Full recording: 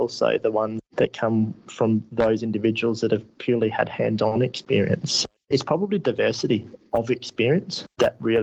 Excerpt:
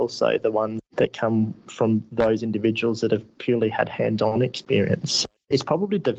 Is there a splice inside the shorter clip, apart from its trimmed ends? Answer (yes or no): no